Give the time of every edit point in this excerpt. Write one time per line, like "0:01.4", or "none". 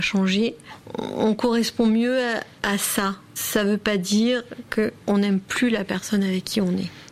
none